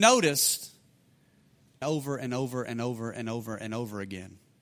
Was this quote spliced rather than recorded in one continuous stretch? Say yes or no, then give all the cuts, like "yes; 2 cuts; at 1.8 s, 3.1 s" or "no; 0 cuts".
yes; 1 cut; at 1.8 s